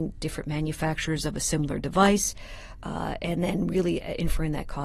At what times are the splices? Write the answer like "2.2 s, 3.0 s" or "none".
none